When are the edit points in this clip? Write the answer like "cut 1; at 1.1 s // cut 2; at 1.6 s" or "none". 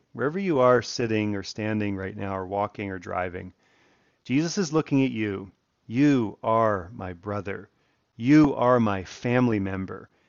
cut 1; at 5.7 s